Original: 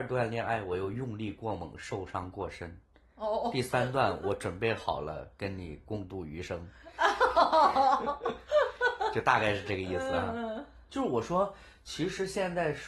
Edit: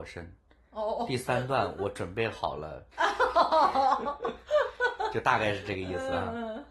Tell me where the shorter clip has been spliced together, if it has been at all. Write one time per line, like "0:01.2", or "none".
0:02.9